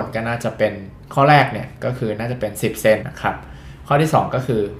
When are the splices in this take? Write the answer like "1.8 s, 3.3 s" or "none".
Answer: 3.0 s